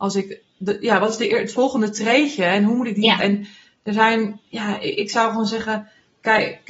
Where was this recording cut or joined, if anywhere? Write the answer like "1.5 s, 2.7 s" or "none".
3.2 s